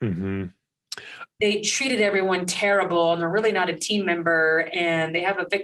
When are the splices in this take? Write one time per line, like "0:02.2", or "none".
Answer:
0:01.4